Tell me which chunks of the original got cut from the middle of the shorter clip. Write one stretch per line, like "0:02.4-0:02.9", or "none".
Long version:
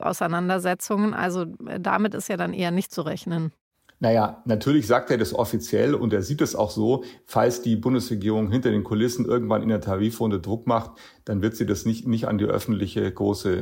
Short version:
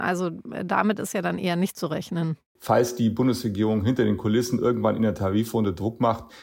0:03.7-0:07.2